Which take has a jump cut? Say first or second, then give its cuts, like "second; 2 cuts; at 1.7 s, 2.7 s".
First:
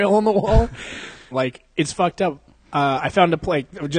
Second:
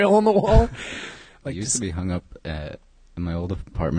first; 1 cut; at 1.3 s